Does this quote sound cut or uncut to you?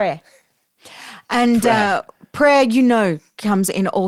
uncut